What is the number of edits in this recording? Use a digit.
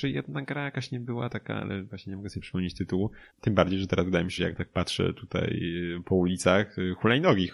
2